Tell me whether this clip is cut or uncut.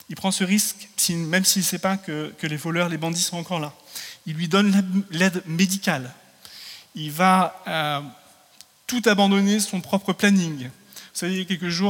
uncut